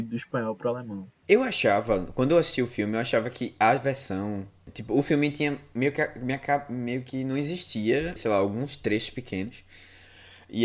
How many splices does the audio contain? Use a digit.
1